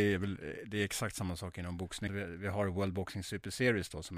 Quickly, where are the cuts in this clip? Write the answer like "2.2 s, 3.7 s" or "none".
2.1 s